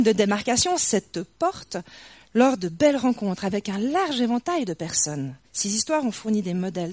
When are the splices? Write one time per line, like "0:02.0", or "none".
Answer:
0:05.4